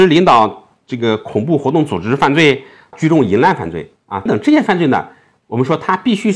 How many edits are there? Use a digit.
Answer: 2